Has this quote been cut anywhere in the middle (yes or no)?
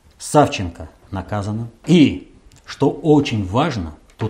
yes